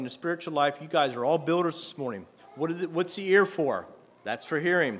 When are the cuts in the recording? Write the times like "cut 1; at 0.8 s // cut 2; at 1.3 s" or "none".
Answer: cut 1; at 2.4 s

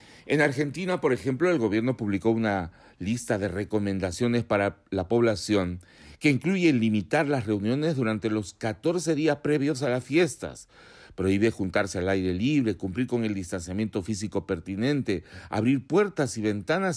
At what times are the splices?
none

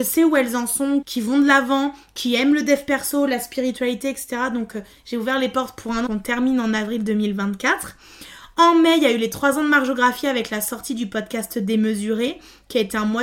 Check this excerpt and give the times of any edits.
cut 1; at 1.0 s // cut 2; at 6.1 s

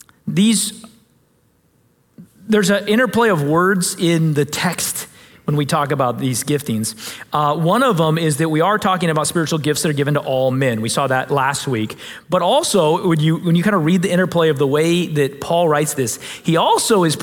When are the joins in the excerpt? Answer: none

